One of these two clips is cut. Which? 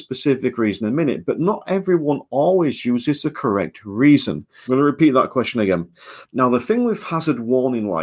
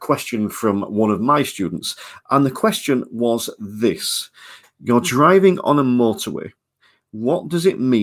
first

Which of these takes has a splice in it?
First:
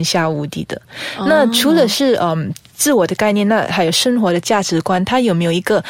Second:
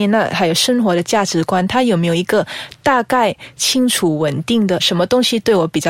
second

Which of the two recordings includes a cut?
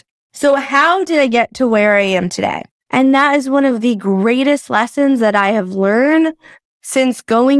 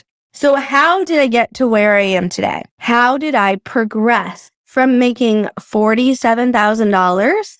first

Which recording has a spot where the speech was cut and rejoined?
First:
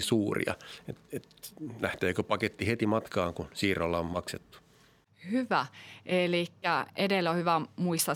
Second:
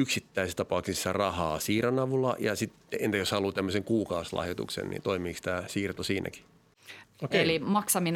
second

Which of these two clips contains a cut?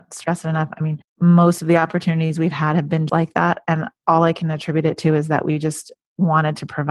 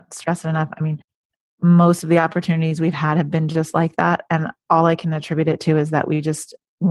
first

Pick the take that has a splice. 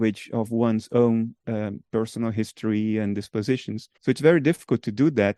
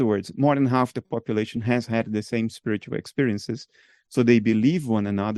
first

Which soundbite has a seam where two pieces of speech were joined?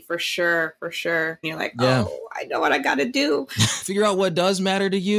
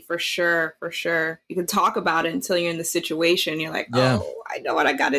first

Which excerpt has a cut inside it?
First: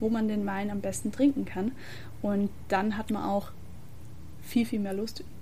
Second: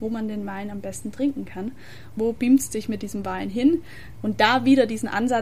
second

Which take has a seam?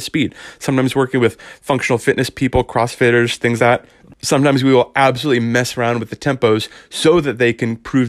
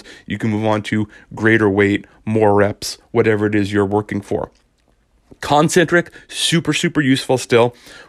first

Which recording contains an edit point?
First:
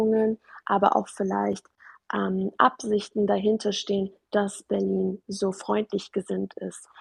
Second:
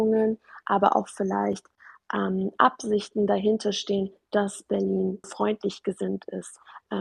second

